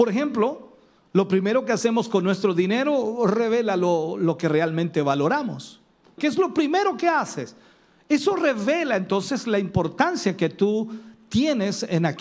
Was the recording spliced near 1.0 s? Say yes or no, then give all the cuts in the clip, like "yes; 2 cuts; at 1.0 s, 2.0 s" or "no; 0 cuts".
no; 1 cut; at 6.2 s